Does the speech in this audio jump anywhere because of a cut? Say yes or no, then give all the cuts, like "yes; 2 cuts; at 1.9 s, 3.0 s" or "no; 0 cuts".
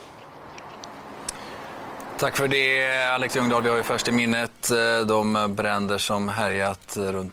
no; 0 cuts